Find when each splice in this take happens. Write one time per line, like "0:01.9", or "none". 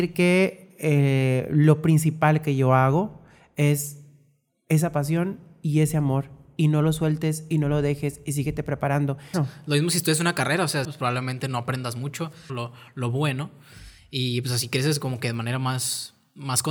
0:09.3
0:10.8
0:12.5